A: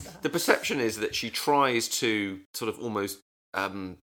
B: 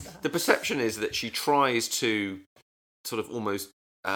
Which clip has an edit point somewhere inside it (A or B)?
A